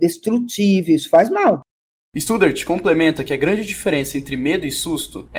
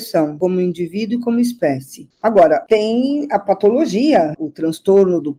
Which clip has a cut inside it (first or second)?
second